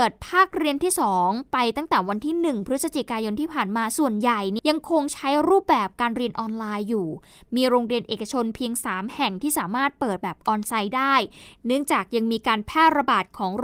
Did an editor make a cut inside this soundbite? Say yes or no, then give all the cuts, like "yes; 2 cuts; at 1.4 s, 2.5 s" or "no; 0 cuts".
yes; 1 cut; at 4.6 s